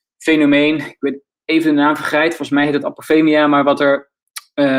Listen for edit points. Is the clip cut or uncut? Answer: uncut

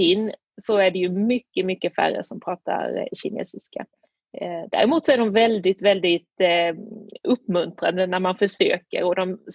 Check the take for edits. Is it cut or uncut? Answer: uncut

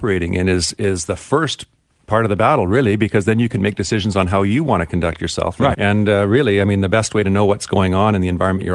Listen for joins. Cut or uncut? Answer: cut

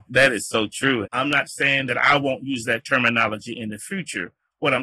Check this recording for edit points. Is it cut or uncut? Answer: cut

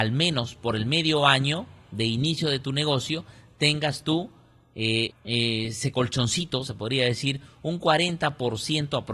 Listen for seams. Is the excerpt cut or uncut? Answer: cut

